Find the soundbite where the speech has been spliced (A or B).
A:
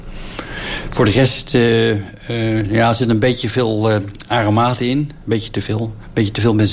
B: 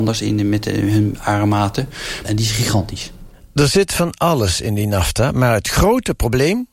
B